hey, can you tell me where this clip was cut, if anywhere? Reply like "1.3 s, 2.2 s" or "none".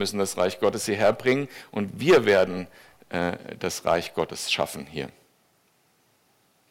none